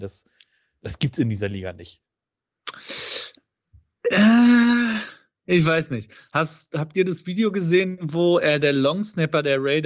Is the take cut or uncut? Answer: uncut